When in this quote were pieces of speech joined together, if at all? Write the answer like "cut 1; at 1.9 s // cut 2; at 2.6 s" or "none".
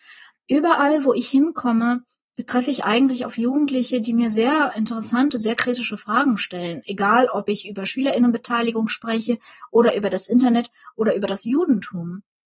none